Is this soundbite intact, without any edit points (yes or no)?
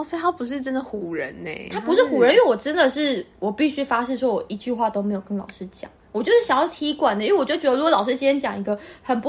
yes